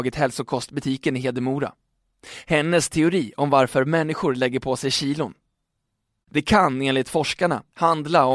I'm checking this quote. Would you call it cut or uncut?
cut